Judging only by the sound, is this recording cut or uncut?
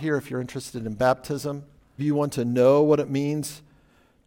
cut